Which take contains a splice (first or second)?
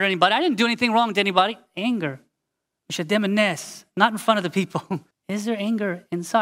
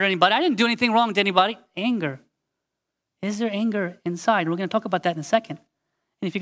first